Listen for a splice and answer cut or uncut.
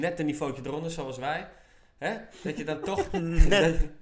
uncut